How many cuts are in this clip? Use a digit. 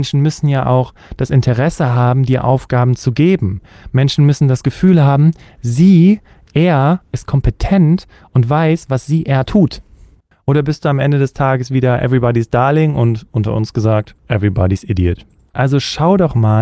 3